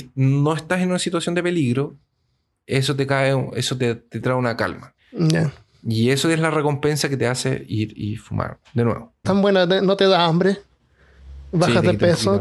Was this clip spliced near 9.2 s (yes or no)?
yes